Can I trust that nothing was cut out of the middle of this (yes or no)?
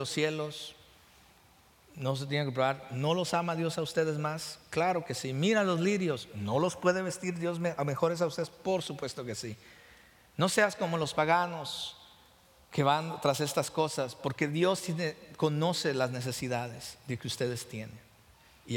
yes